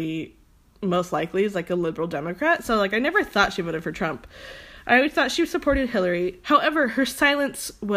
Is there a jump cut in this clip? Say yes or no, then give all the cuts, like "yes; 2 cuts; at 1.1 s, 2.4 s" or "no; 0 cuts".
no; 0 cuts